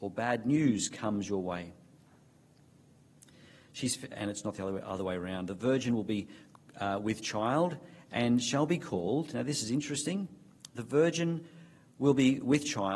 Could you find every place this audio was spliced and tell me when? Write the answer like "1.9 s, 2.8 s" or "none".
4.1 s